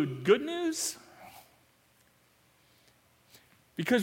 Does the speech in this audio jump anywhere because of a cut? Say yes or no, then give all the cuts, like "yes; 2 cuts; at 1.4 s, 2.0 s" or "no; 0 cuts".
no; 0 cuts